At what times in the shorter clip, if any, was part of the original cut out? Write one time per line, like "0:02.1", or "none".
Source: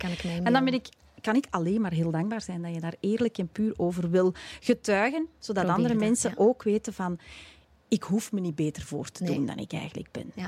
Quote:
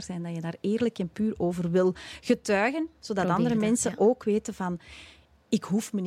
none

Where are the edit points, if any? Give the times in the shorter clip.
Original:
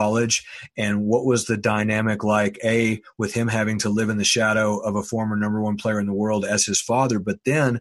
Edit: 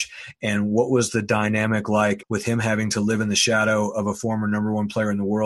0:02.2

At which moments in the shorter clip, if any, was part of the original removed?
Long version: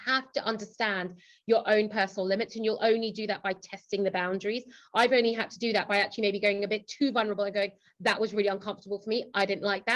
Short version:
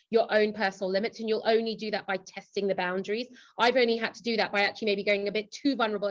none

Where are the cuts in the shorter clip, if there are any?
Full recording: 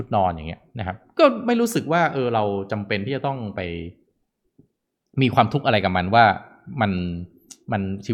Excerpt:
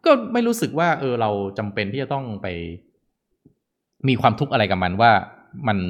none

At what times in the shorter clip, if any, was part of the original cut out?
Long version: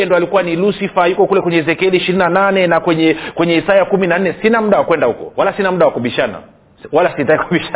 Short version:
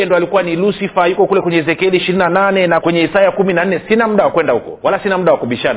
0:02.8

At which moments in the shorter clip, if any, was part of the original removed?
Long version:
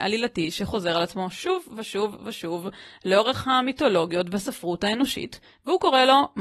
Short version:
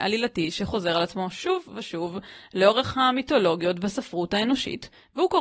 0:01.7

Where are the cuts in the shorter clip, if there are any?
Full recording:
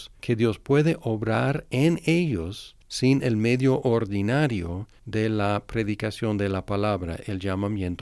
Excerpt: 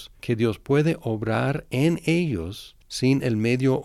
none

